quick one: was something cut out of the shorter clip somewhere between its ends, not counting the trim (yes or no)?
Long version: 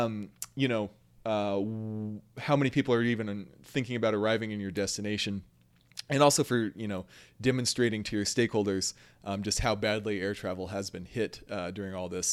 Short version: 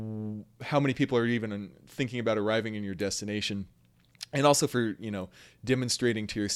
no